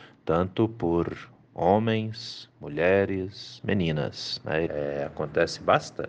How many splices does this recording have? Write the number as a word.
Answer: two